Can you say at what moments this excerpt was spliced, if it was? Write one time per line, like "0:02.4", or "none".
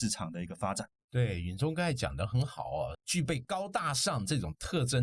0:02.9